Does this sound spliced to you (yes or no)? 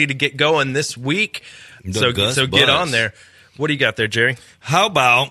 yes